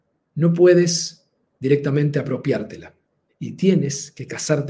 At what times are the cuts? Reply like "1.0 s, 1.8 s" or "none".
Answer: 3.3 s